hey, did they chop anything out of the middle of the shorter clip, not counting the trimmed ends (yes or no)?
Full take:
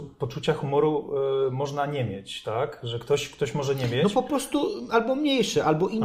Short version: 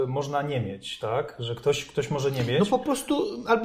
no